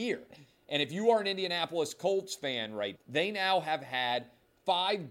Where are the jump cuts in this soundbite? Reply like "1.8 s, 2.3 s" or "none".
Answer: 2.9 s